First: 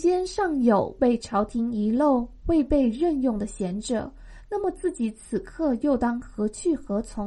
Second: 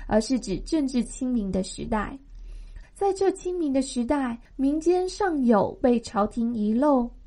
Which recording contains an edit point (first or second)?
second